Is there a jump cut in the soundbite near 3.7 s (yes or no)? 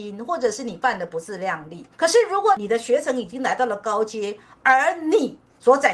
no